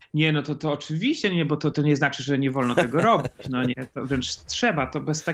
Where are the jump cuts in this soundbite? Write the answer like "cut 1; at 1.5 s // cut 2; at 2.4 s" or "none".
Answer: cut 1; at 1.7 s